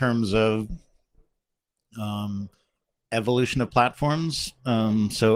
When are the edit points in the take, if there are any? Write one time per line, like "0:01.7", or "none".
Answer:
none

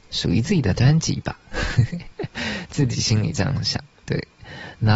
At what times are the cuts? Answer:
none

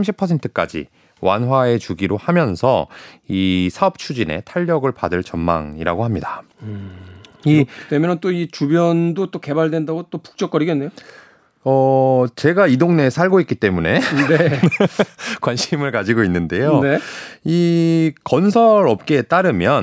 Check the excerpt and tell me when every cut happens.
0:06.5

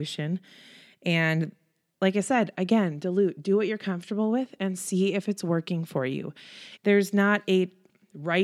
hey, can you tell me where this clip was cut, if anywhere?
0:06.8

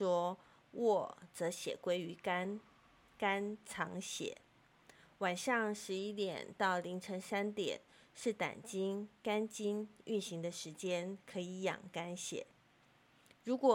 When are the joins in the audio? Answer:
none

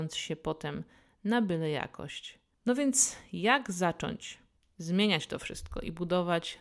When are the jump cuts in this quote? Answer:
none

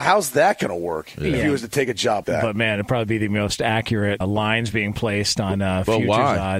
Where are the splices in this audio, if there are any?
0:02.2
0:04.2

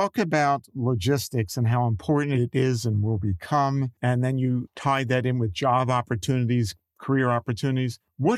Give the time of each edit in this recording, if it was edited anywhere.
0:04.7

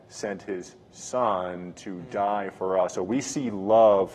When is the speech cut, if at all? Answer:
none

